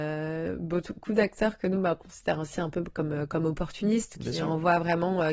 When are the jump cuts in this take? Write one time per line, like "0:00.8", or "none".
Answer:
none